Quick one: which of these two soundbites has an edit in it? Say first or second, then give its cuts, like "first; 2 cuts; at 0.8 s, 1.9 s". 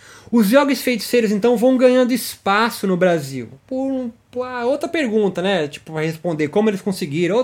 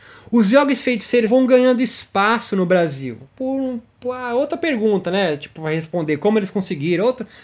second; 1 cut; at 1.3 s